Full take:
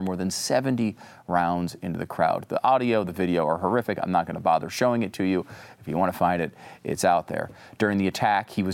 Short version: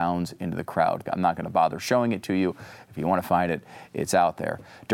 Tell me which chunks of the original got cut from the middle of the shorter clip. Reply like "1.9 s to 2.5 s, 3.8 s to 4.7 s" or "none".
2.5 s to 4.0 s